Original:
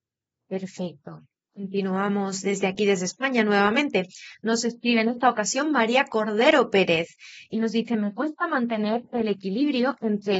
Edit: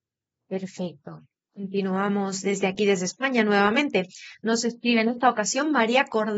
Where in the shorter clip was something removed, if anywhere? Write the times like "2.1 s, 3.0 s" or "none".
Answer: none